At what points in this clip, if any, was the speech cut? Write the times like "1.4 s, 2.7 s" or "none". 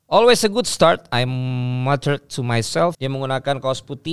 2.9 s